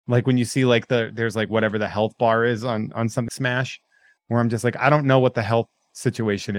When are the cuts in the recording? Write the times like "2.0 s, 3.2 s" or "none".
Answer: 3.3 s